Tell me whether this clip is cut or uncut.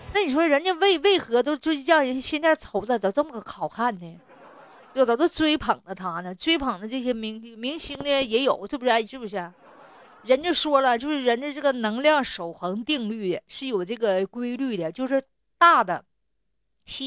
cut